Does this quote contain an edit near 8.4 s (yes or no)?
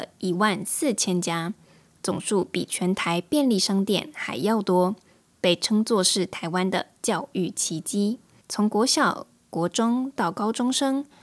yes